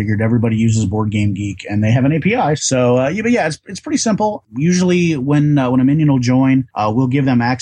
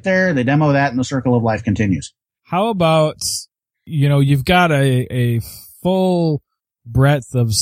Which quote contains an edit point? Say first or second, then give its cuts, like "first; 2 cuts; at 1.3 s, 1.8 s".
first; 1 cut; at 2.6 s